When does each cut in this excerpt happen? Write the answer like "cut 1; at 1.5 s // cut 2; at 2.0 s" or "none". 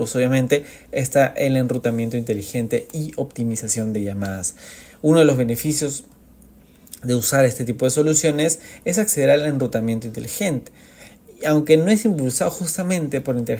none